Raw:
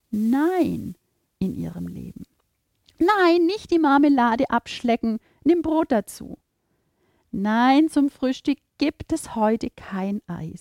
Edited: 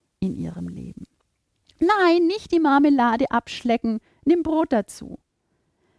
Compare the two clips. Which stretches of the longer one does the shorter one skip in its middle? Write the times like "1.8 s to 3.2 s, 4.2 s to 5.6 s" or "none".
none